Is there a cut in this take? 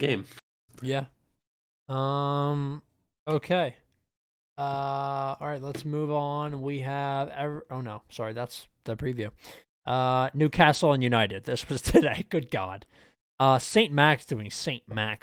no; 0 cuts

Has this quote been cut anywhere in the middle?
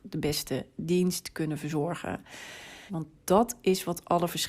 yes; 1 cut; at 2.9 s

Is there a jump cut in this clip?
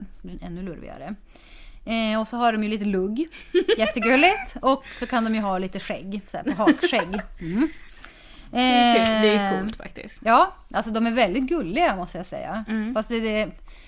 no; 0 cuts

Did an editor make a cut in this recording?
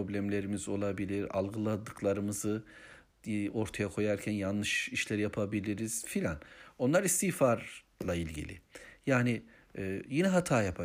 yes; 1 cut; at 1.3 s

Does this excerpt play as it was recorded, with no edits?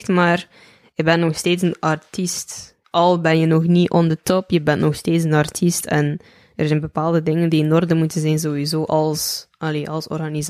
no; 1 cut; at 2.8 s

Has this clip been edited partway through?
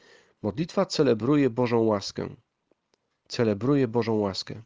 no; 0 cuts

